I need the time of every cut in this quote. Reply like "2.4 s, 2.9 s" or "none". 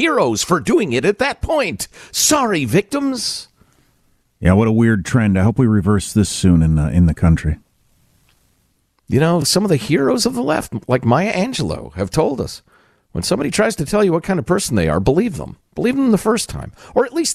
none